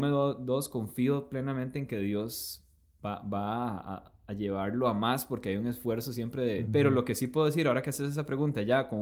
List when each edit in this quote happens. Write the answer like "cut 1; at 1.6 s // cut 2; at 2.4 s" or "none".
cut 1; at 6.6 s